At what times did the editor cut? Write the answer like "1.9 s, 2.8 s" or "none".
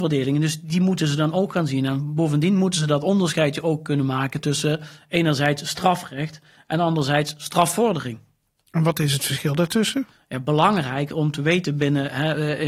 none